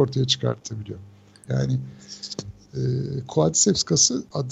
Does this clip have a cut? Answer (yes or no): yes